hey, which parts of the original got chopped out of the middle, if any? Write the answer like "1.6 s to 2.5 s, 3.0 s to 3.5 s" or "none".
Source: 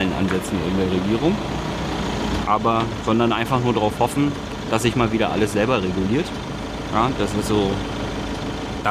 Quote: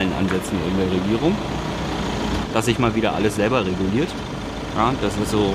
2.5 s to 4.6 s